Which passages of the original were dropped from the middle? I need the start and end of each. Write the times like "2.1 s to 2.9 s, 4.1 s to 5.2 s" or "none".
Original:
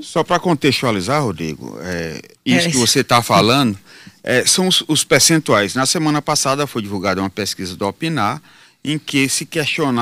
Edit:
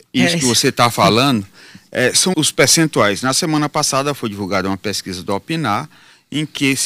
4.6 s to 4.9 s